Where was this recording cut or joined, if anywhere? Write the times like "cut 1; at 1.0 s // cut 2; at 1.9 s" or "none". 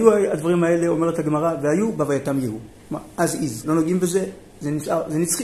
cut 1; at 3.6 s